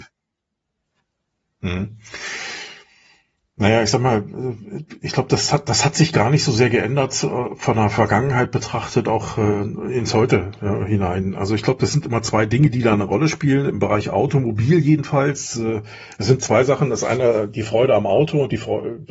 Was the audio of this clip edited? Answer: no; 0 cuts

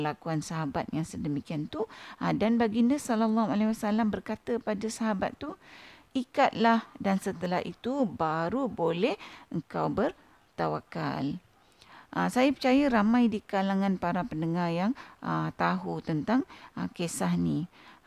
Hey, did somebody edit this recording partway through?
no; 0 cuts

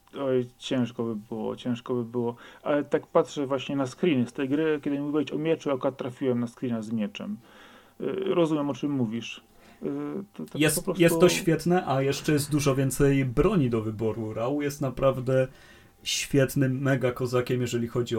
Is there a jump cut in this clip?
no; 0 cuts

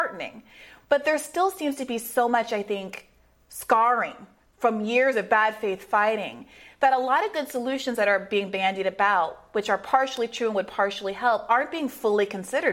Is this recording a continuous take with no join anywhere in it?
yes; 0 cuts

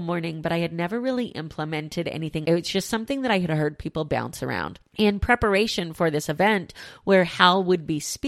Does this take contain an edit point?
yes; 1 cut; at 2.4 s

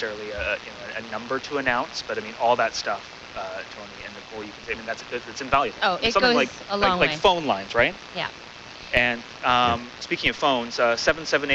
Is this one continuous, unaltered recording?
yes; 0 cuts

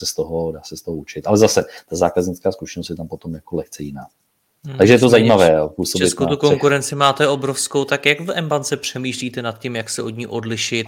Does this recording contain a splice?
no; 0 cuts

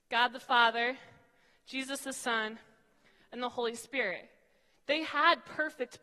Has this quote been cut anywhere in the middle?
yes; 1 cut; at 4.7 s

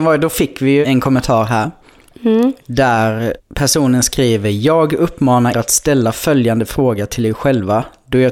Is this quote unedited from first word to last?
no; 1 cut; at 5.5 s

